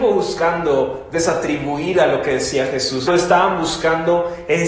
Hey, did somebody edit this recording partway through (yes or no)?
yes